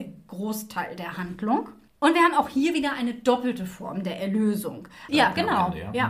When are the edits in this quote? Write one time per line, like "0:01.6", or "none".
0:05.1